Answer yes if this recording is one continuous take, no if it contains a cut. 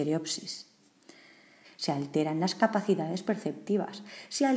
no